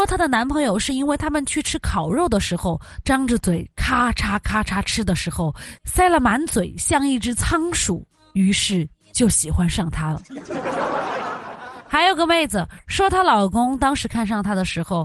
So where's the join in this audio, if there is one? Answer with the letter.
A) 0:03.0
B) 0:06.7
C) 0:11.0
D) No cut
A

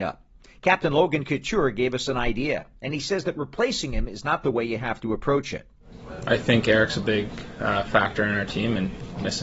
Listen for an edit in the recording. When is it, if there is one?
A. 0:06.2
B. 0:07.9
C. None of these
C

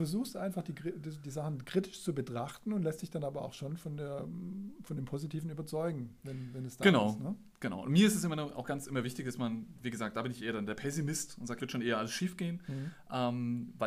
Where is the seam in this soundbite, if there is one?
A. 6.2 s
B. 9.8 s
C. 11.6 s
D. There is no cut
C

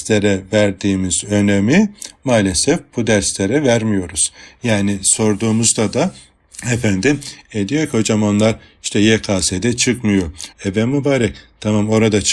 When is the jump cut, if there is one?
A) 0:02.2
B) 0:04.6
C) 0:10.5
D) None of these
C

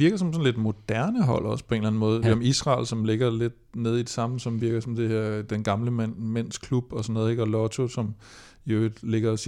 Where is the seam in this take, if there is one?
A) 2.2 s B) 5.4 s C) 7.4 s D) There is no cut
A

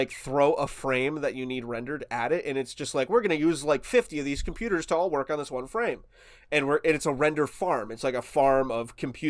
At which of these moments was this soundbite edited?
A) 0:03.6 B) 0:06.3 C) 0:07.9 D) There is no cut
D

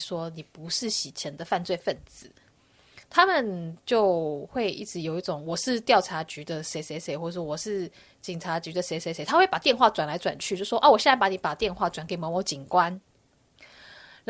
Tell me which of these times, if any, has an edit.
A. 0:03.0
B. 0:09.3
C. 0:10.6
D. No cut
A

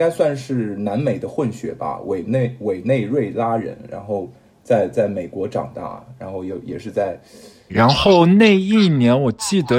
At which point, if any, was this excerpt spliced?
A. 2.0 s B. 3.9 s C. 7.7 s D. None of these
C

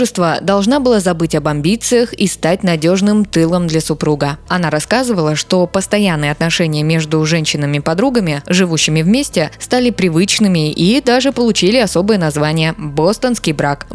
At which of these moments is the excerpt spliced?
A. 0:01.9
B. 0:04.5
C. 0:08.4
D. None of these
B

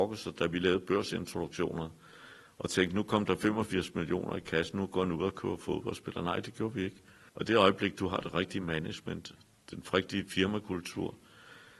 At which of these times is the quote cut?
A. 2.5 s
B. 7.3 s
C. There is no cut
B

